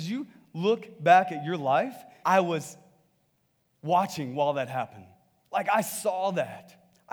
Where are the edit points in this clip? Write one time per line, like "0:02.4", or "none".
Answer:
0:02.2